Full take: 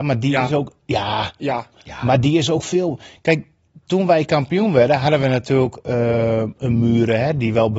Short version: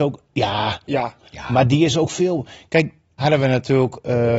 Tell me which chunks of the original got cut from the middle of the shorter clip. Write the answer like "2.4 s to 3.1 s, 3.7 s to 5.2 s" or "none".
3.7 s to 5.0 s